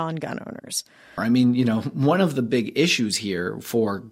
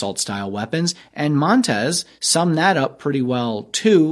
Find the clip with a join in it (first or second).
first